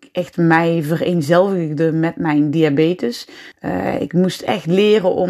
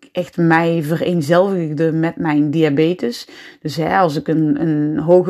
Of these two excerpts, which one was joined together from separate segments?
first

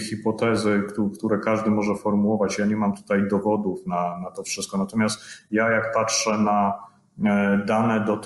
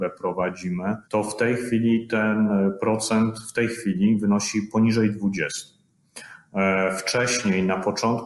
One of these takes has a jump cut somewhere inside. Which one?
second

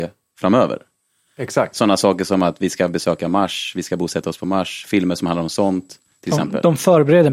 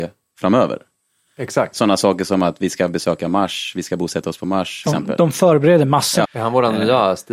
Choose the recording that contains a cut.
second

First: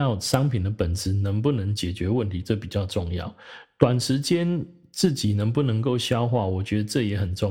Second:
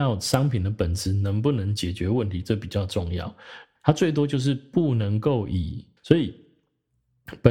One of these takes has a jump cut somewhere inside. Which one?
second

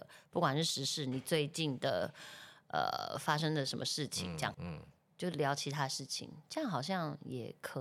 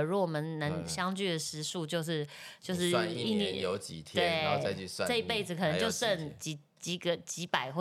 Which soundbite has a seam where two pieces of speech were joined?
first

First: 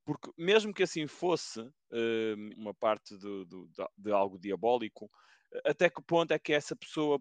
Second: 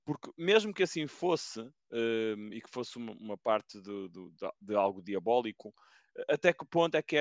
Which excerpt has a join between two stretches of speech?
first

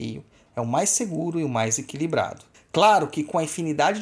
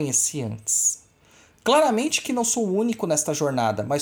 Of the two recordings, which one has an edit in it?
first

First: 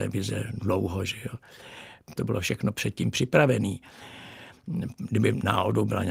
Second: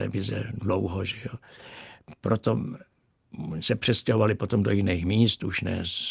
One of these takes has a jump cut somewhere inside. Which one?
first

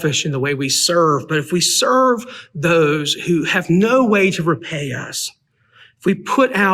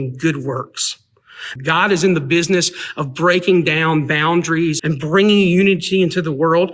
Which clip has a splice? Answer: second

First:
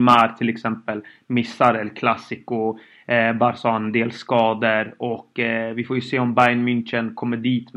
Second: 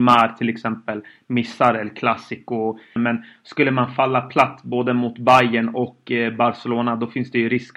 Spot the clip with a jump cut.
second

